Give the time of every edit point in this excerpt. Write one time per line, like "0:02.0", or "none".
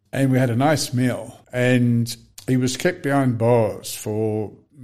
0:01.4